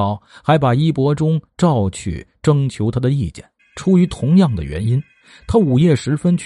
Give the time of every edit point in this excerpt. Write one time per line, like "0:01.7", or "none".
0:03.6